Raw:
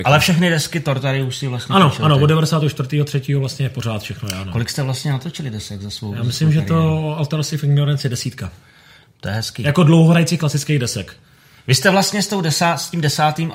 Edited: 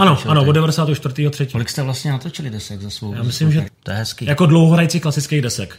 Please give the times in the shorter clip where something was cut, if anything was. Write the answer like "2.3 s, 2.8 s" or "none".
1.5 s, 3.6 s